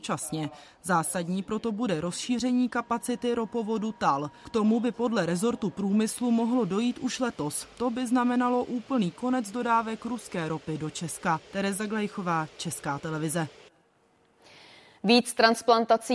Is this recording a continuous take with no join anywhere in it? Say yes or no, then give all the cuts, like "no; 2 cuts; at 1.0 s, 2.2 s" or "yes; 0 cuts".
no; 1 cut; at 11.4 s